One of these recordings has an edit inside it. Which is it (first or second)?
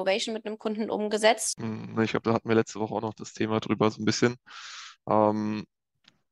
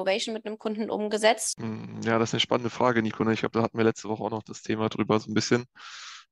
first